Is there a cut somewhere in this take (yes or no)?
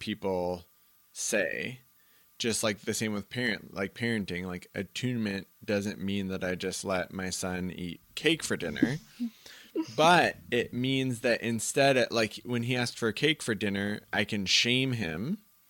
no